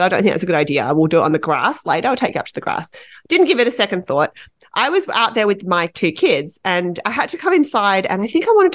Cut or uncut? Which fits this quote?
uncut